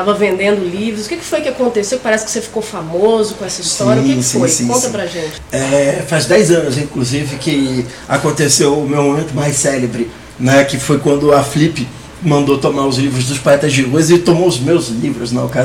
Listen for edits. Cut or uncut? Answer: uncut